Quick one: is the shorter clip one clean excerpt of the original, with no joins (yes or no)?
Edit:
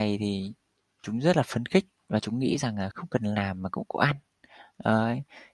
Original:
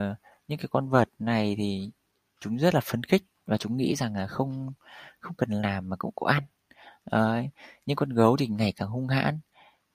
no